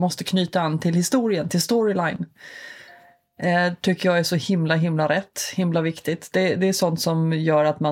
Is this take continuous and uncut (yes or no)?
yes